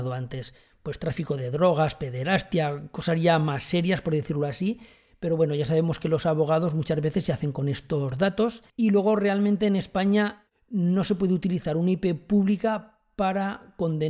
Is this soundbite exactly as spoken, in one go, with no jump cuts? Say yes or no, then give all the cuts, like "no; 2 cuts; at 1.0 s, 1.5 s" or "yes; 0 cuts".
no; 2 cuts; at 8.7 s, 10.5 s